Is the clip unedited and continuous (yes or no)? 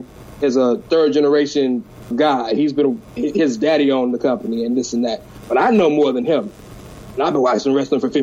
no